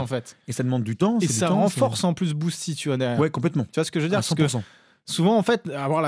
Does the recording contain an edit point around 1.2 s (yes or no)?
no